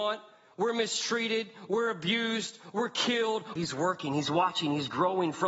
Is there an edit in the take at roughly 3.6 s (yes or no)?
yes